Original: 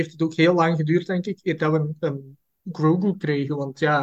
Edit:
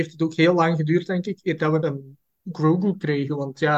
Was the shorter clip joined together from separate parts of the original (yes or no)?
yes